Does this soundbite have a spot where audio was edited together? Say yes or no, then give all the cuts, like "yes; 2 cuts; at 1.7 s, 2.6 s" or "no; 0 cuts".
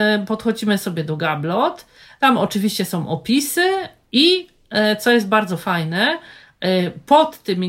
no; 0 cuts